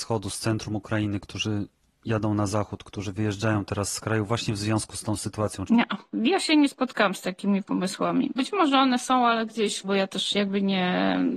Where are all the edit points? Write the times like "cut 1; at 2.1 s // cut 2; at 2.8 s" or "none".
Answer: cut 1; at 5.7 s // cut 2; at 8.4 s // cut 3; at 9.8 s